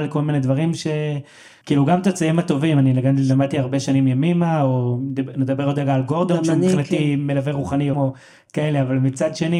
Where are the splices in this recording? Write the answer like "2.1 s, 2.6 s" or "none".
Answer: 1.6 s, 7.9 s